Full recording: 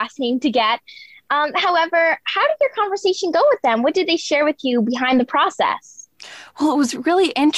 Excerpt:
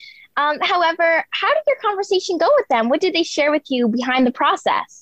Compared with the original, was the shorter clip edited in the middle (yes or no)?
no